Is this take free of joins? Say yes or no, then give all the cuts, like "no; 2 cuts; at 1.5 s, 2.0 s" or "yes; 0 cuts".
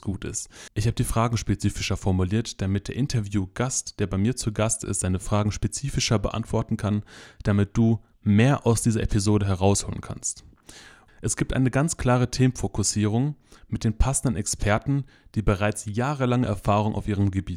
no; 1 cut; at 11.1 s